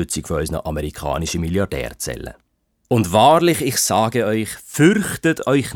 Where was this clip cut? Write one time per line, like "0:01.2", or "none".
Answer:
0:02.8